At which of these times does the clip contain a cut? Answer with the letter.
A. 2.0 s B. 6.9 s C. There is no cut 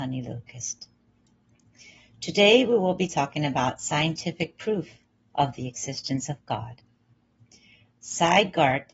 C